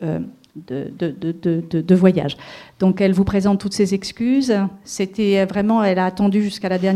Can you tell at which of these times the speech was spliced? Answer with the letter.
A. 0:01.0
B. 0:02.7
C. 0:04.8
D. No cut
D